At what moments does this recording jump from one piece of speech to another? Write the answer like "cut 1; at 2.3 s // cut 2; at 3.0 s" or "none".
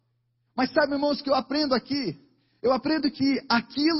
none